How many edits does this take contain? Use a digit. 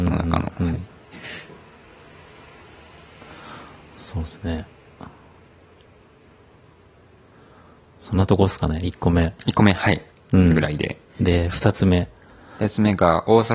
1